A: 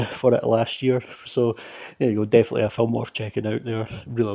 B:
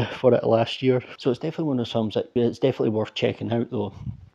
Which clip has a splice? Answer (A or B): B